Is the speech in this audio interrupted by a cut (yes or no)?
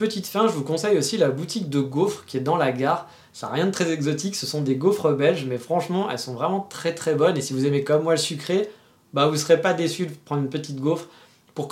no